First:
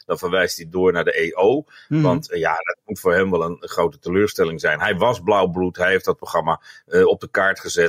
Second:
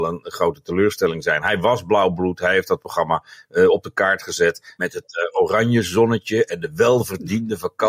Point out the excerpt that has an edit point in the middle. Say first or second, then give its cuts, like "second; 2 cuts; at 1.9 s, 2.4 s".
second; 1 cut; at 4.8 s